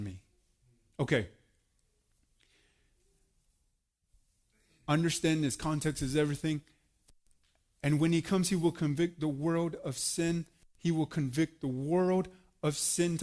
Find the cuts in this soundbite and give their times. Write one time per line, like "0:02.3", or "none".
0:00.9